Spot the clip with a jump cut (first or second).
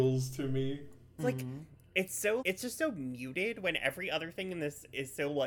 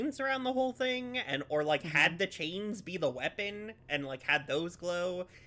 first